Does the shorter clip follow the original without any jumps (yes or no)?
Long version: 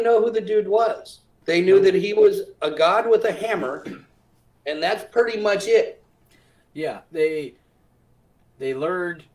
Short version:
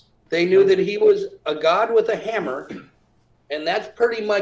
yes